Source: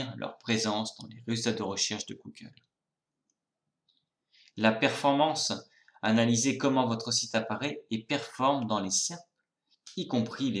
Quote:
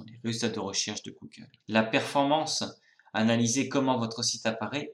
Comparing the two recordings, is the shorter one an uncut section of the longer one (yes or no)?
no